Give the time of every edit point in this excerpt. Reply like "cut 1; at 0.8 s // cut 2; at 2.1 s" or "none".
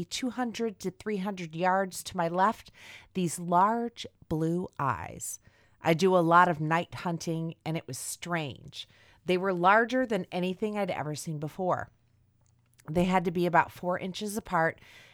none

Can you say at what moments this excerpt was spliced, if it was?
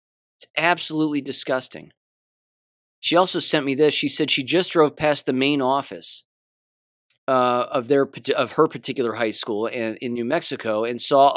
none

